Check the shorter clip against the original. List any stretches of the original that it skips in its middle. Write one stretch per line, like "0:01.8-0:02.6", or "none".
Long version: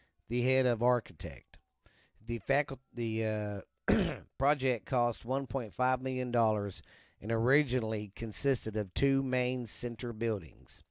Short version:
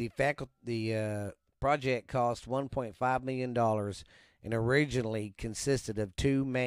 0:03.8-0:04.3